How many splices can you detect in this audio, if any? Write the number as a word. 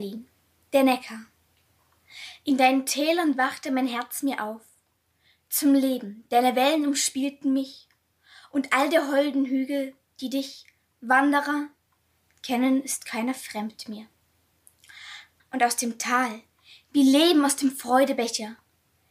one